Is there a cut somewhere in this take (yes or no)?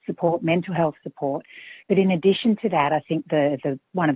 no